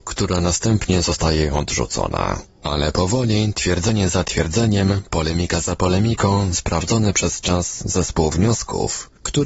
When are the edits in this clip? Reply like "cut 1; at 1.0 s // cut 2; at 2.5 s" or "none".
cut 1; at 6.5 s